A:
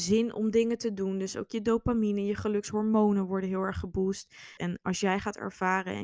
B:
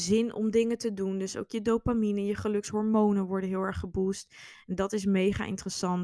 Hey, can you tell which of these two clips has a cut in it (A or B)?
A